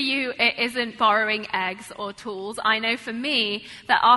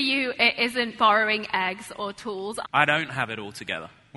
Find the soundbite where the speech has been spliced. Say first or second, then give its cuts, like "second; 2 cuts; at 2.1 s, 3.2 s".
second; 1 cut; at 2.6 s